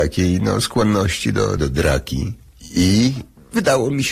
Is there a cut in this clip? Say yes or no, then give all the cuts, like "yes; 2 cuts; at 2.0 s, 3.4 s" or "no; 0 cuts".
yes; 1 cut; at 1.6 s